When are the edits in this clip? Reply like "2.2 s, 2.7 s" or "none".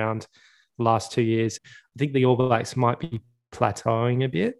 1.6 s